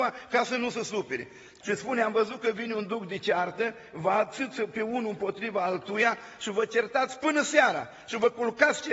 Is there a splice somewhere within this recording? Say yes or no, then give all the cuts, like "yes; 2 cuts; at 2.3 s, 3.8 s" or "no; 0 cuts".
yes; 1 cut; at 1.6 s